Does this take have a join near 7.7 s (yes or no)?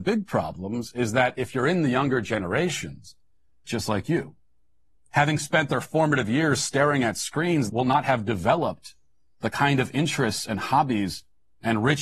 yes